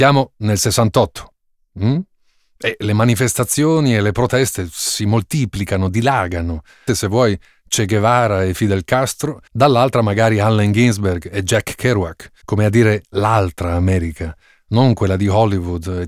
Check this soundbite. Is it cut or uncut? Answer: cut